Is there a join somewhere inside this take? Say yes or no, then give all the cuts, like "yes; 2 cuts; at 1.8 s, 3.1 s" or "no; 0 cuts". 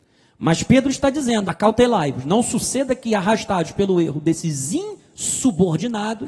yes; 1 cut; at 1.5 s